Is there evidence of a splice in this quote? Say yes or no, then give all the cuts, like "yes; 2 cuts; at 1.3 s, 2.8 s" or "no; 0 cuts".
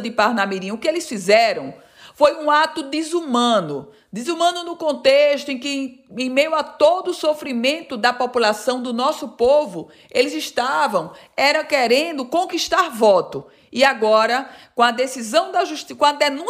no; 0 cuts